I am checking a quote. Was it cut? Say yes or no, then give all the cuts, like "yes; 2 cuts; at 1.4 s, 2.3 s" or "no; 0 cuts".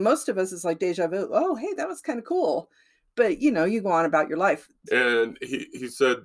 yes; 1 cut; at 4.9 s